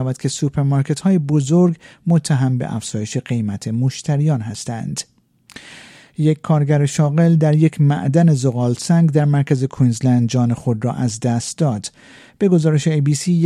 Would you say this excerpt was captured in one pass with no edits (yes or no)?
yes